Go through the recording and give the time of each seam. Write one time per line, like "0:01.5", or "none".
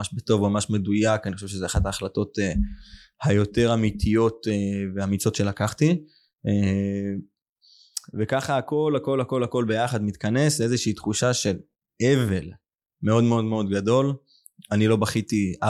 none